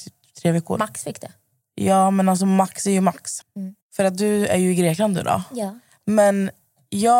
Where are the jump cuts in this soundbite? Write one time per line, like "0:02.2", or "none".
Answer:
0:03.4